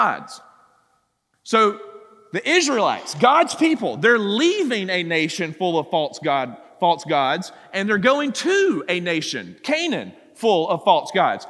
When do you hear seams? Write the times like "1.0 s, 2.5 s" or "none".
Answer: none